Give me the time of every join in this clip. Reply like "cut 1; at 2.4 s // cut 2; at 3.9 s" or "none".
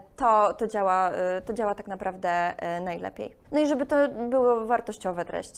cut 1; at 3.4 s